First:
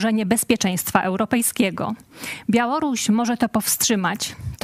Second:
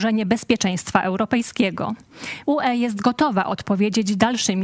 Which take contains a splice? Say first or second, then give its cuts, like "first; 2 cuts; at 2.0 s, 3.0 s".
second; 1 cut; at 2.4 s